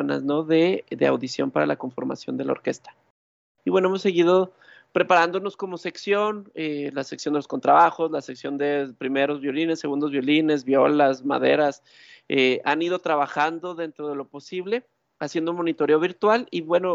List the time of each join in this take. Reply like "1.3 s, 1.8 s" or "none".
3.6 s